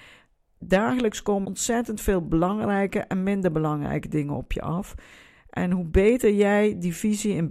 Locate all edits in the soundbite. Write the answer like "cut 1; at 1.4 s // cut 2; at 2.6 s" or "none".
cut 1; at 1.4 s